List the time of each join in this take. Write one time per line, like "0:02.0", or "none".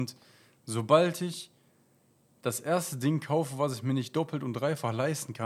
none